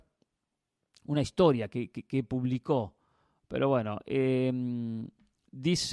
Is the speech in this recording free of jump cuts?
yes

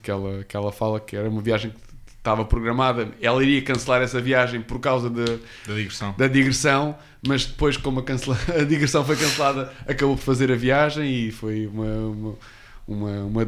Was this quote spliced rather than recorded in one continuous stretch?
no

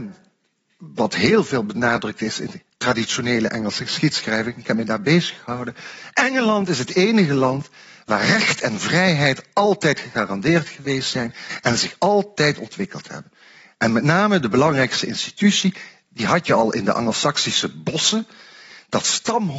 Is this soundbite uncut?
yes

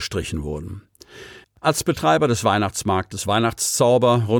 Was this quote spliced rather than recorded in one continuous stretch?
yes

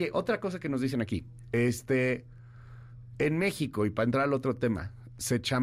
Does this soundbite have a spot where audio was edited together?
no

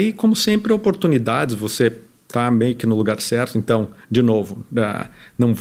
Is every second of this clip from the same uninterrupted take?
yes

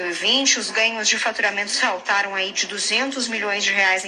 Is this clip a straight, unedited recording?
yes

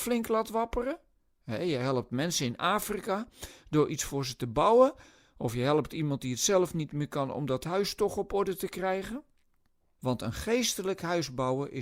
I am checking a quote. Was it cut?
yes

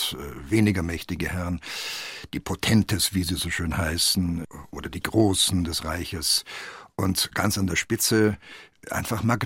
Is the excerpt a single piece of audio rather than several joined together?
yes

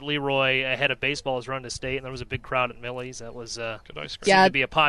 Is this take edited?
no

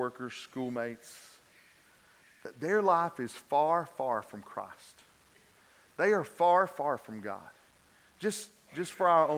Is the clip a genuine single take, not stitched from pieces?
yes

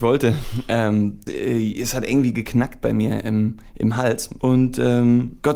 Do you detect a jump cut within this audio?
yes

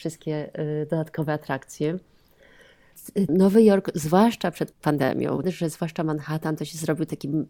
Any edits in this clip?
yes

